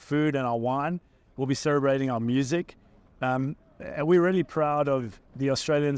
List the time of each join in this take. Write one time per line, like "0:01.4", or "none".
none